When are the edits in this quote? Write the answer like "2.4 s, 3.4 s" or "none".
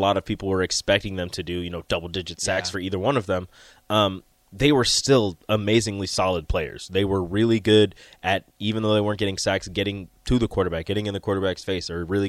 none